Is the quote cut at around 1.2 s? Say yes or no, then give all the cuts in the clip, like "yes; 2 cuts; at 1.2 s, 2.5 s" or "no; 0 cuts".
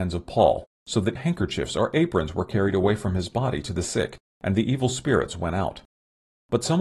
yes; 1 cut; at 1.2 s